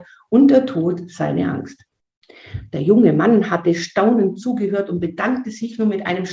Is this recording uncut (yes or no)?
yes